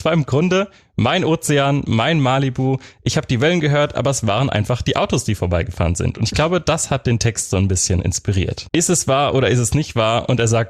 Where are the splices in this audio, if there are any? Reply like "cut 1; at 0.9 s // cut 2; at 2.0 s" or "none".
cut 1; at 8.7 s